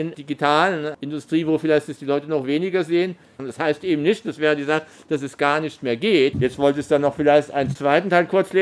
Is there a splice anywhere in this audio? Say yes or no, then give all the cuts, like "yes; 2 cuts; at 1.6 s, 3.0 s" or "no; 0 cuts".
yes; 2 cuts; at 3.4 s, 6.3 s